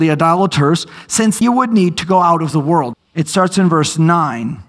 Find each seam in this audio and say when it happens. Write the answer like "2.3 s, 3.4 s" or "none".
1.4 s, 2.9 s